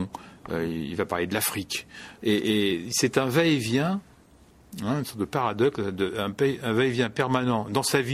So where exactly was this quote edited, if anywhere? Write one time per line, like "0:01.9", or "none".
0:02.2